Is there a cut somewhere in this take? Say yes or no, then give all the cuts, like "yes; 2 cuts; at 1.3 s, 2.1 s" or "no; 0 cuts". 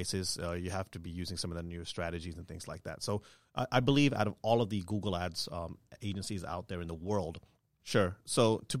yes; 1 cut; at 7.8 s